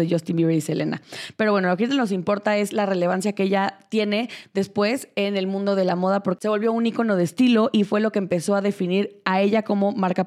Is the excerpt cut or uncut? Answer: uncut